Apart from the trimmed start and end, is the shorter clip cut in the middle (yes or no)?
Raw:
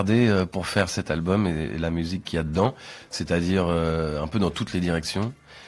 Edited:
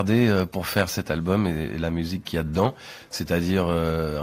no